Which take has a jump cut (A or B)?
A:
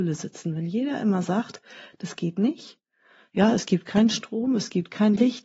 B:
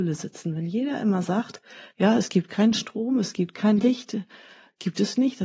B